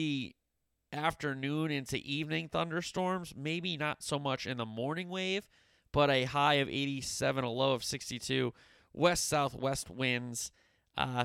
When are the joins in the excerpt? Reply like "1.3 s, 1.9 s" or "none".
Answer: none